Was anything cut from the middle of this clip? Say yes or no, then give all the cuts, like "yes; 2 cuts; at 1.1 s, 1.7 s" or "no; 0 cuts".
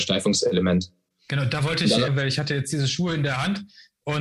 yes; 1 cut; at 2.1 s